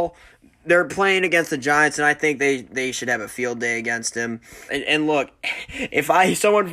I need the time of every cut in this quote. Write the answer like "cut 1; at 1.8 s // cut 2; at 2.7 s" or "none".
cut 1; at 4.7 s

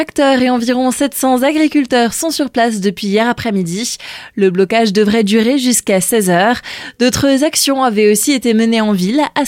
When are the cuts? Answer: none

